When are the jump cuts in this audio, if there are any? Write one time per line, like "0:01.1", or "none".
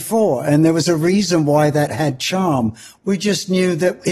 0:03.0

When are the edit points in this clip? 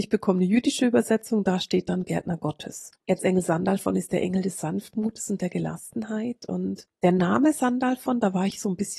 0:03.1

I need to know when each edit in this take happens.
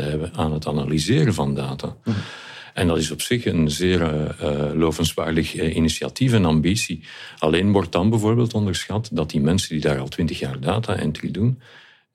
none

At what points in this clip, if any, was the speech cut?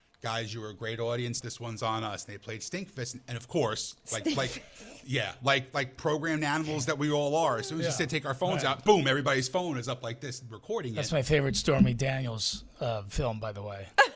0:01.4

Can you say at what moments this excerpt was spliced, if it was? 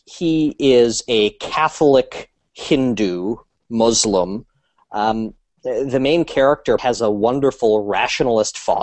0:04.8
0:06.8

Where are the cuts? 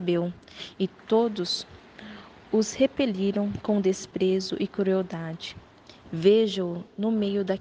0:06.0

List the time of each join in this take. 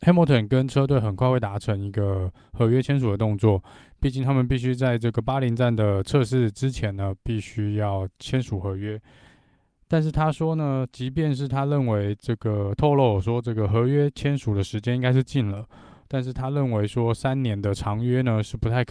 none

